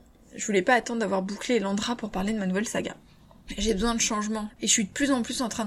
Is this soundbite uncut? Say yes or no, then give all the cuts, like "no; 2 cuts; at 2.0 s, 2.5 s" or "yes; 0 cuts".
no; 2 cuts; at 3.5 s, 4.5 s